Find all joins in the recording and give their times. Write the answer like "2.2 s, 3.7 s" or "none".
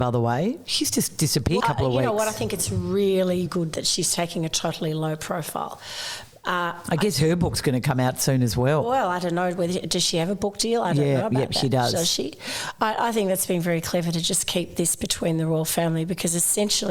1.6 s, 3.5 s